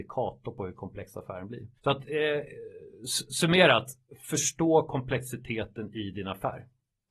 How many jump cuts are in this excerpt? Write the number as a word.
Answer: one